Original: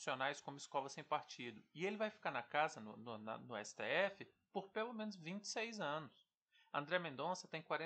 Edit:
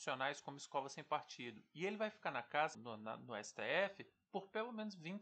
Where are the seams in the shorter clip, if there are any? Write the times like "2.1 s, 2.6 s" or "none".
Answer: 2.7 s